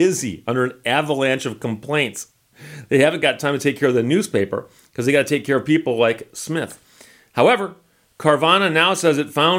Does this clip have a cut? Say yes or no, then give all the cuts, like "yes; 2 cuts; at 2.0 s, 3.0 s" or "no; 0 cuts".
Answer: no; 0 cuts